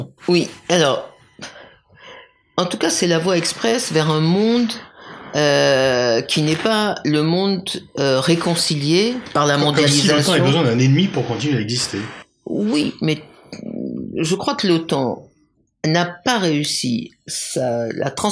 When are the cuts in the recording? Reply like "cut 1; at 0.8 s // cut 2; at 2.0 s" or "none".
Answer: none